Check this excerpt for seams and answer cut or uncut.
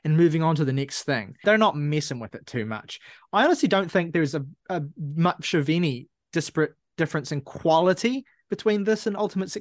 cut